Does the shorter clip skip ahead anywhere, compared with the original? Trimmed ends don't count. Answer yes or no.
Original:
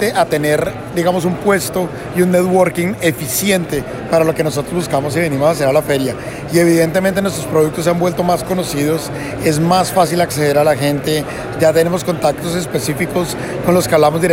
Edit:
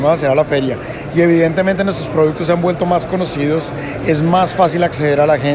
no